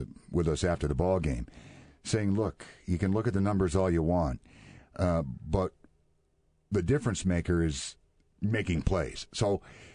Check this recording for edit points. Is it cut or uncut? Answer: uncut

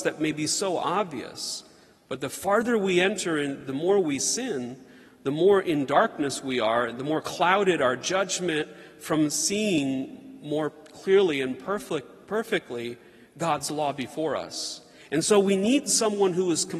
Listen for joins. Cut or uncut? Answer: uncut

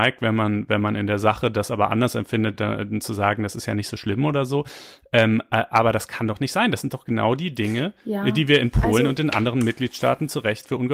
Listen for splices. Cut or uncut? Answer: uncut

